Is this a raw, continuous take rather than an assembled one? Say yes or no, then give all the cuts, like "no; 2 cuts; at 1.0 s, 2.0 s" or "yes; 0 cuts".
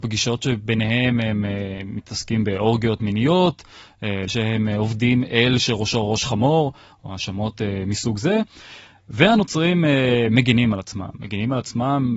no; 1 cut; at 4.3 s